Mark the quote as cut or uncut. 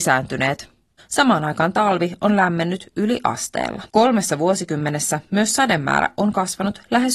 cut